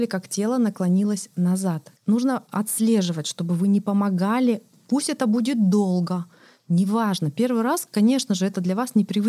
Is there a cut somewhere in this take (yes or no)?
yes